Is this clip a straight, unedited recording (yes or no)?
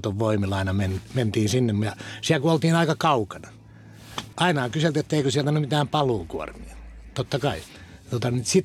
no